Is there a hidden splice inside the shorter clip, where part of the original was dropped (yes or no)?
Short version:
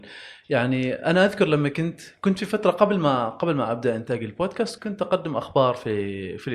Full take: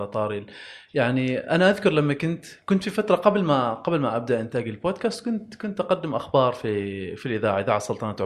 yes